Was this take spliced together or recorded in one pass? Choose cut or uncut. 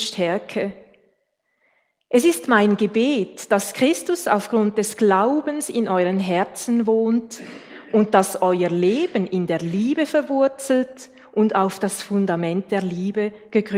uncut